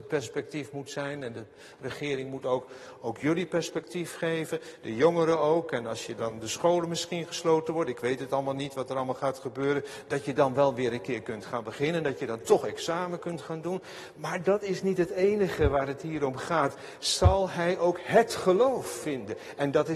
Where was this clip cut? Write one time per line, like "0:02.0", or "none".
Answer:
none

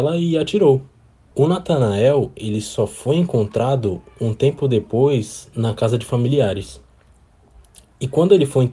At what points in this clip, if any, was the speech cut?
0:01.3

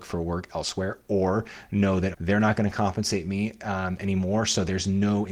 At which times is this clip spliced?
0:02.1

